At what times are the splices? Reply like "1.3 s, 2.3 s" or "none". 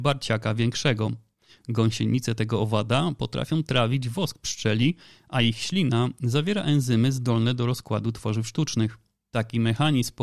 9.2 s